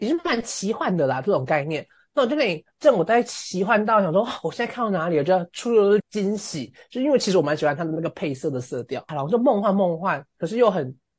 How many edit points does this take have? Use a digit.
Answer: 1